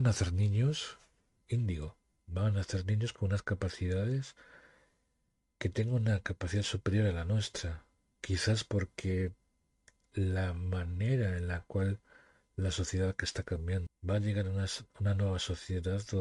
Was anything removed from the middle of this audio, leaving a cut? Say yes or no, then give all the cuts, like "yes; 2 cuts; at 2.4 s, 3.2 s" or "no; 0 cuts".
yes; 1 cut; at 13.9 s